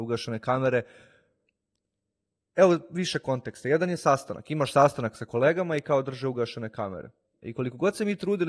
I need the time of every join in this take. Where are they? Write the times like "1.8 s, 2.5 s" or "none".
7.4 s